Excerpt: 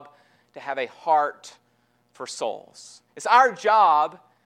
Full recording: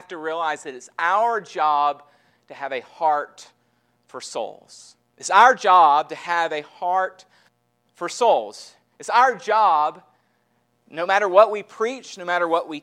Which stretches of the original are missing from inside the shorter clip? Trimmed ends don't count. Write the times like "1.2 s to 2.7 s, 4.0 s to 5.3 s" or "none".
5.0 s to 8.9 s